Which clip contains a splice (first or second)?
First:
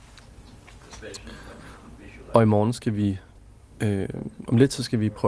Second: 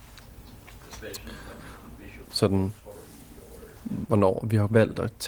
second